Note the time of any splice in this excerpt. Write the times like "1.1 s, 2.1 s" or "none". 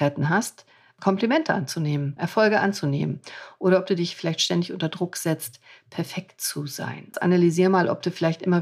2.2 s, 7.1 s